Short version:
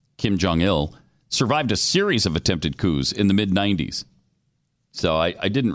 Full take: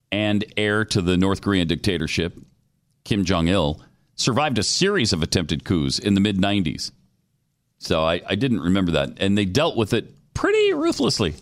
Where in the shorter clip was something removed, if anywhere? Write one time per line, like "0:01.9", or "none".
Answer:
none